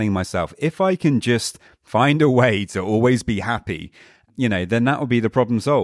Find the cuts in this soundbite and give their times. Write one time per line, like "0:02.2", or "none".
none